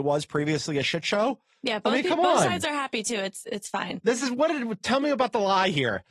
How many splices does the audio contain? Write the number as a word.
one